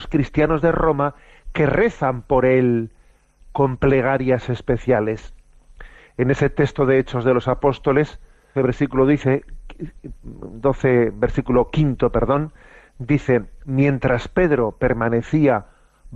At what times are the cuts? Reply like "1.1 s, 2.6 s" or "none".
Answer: 8.6 s